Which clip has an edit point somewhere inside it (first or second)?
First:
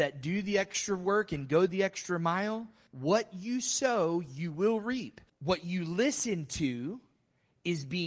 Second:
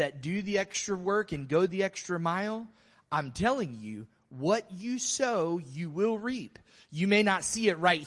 first